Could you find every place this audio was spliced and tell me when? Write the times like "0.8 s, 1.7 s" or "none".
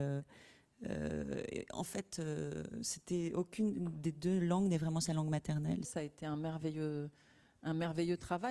5.9 s